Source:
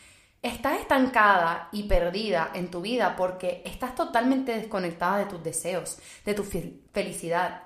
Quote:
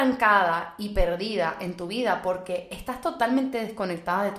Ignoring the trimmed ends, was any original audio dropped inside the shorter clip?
no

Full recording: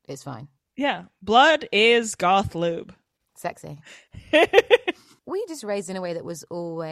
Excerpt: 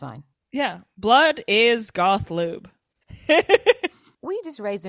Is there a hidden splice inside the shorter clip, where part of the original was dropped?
yes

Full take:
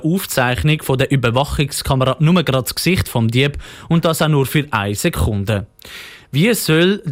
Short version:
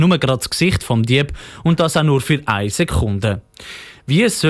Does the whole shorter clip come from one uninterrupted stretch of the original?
yes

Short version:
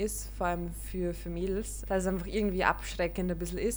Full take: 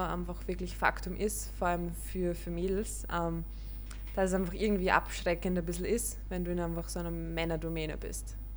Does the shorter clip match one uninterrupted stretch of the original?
no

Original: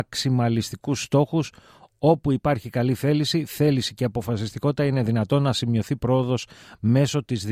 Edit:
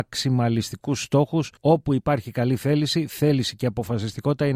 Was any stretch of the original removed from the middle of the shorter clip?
yes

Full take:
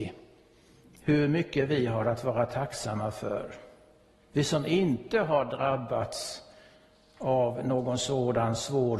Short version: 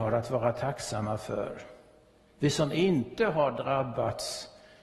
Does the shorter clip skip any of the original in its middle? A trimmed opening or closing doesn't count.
no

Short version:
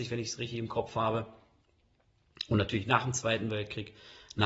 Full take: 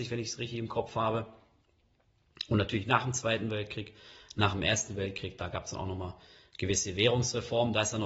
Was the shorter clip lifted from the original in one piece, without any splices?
yes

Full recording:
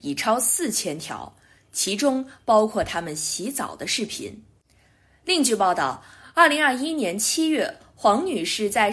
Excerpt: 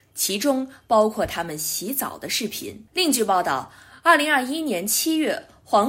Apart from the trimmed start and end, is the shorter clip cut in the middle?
yes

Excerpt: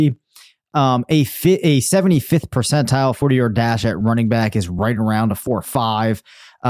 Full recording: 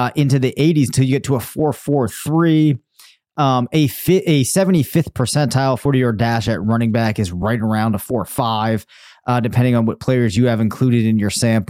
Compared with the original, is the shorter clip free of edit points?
yes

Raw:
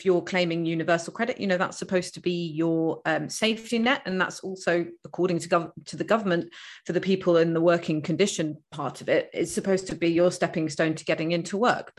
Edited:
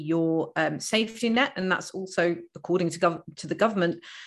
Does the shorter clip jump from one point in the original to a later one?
no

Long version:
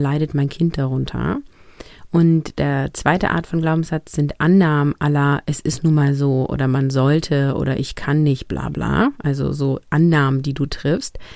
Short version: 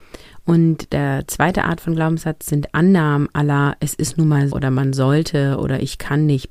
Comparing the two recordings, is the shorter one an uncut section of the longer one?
no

